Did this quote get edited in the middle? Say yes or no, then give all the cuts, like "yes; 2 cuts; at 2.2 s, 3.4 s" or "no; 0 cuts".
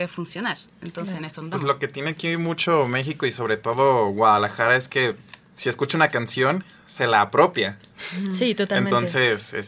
no; 0 cuts